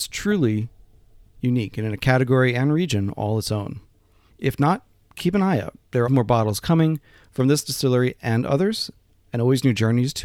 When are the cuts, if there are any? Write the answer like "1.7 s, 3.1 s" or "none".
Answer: 4.3 s, 6.1 s